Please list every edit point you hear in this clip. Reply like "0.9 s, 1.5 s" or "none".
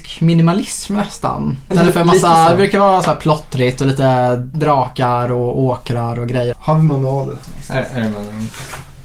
6.5 s